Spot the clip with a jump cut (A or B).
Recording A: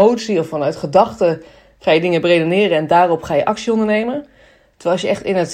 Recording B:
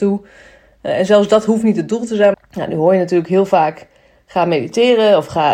B